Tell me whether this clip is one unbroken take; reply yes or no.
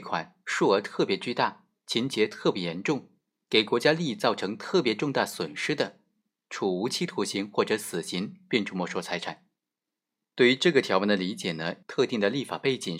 no